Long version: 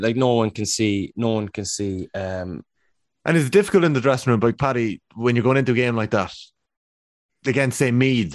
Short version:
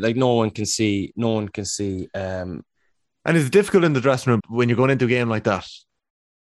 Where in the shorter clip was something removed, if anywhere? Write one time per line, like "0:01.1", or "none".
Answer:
0:04.4